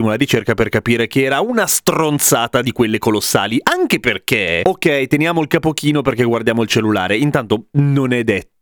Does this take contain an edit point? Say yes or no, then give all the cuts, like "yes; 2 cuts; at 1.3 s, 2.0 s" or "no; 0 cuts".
no; 0 cuts